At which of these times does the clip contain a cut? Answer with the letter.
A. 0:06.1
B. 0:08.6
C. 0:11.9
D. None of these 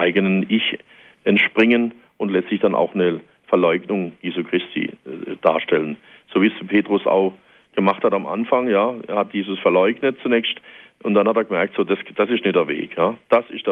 D